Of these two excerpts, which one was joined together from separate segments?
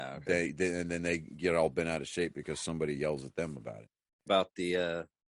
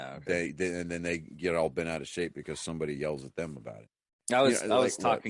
first; 1 cut; at 4.3 s

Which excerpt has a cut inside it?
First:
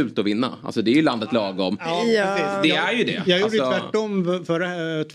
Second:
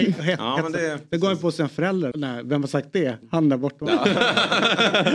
second; 1 cut; at 2.1 s

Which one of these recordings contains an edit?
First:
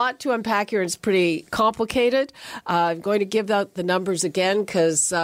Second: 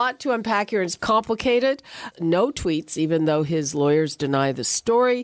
second; 2 cuts; at 1.0 s, 2.1 s

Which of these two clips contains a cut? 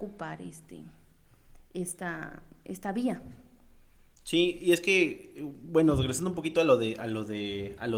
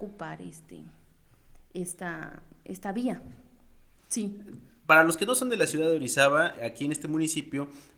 second; 2 cuts; at 4.0 s, 6.6 s

